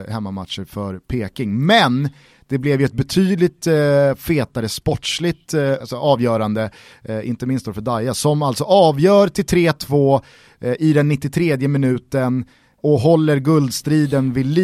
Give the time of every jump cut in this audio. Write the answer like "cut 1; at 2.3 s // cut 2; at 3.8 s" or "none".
cut 1; at 5.8 s